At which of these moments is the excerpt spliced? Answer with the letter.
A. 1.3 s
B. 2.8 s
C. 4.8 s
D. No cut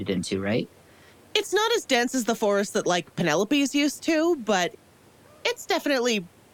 D